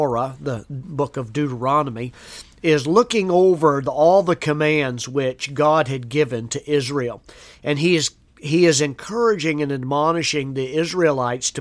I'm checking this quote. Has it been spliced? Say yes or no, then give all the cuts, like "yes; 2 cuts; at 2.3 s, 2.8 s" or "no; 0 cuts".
no; 0 cuts